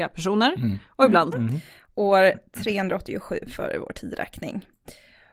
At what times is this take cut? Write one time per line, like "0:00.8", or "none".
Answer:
0:01.3